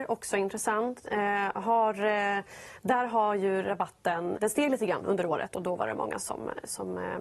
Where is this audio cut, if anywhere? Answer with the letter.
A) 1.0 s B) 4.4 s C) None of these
B